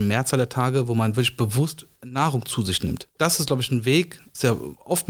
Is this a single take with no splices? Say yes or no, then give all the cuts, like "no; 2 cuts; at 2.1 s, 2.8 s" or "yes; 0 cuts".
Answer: no; 1 cut; at 1.9 s